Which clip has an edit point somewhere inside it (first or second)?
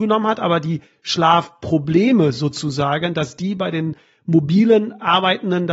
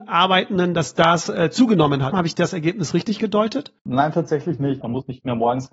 second